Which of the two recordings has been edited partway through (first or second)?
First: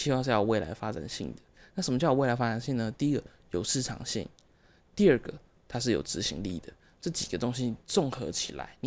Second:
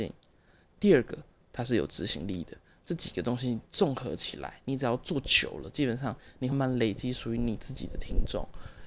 second